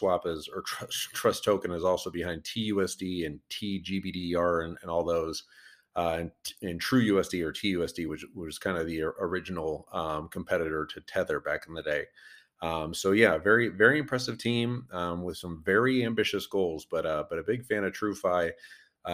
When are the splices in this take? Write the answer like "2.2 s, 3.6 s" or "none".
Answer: none